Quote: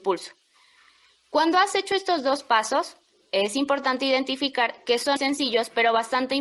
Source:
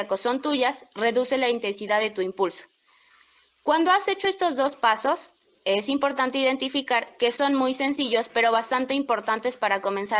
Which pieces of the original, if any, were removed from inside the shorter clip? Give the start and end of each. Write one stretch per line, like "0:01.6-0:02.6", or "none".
0:07.5-0:07.7